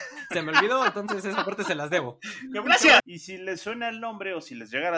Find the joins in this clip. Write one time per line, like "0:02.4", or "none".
0:03.0